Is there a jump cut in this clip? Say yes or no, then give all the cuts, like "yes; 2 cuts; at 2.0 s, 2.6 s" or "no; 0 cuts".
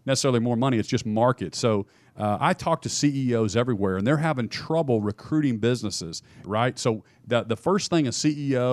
yes; 1 cut; at 6.4 s